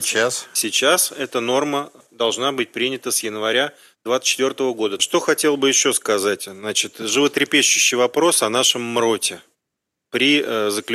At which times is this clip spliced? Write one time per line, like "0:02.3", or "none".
0:05.0